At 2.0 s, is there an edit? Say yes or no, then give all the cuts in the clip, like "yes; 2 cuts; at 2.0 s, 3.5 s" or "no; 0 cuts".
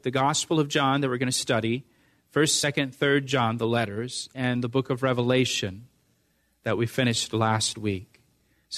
no; 0 cuts